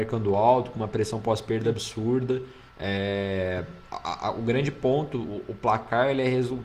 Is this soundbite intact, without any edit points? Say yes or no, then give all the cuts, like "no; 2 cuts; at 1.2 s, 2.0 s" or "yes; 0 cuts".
no; 1 cut; at 2.7 s